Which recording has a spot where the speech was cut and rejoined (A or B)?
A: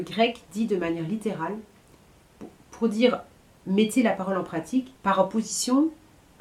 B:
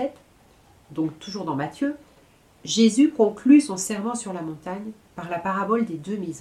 A